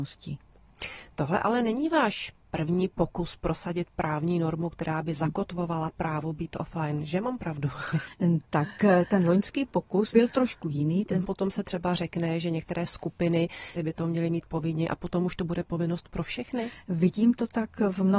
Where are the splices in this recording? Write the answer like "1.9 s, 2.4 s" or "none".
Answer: 10.1 s, 11.2 s, 13.8 s

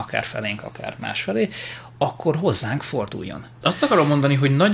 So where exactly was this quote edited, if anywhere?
3.6 s

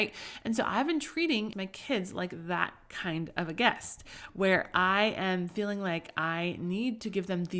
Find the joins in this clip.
1.5 s

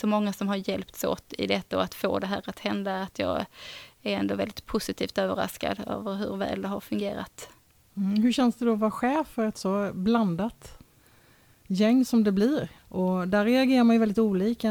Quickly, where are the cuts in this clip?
12.8 s

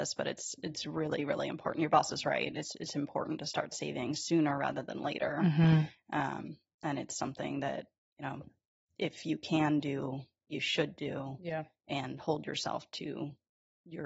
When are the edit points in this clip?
none

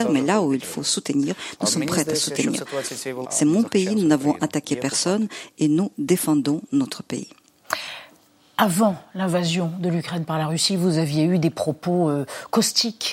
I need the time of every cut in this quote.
3.2 s

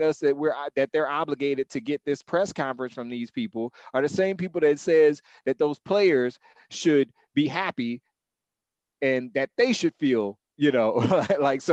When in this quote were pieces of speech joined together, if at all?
none

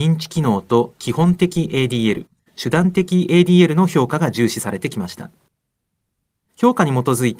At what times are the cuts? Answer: none

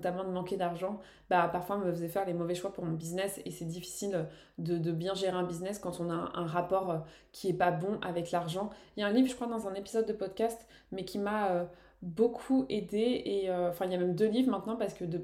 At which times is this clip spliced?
9.3 s

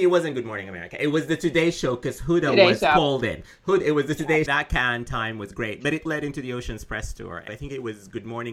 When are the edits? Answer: 4.5 s, 6.1 s, 7.5 s

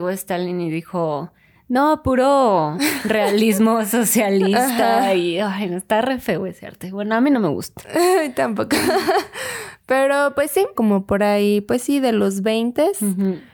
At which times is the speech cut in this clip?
10.7 s

